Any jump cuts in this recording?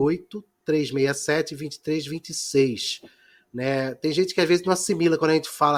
no; 0 cuts

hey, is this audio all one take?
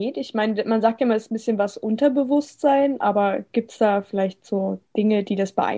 yes; 0 cuts

